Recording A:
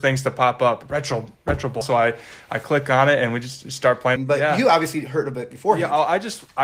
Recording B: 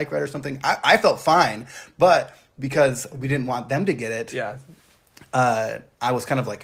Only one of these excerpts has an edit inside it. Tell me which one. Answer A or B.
A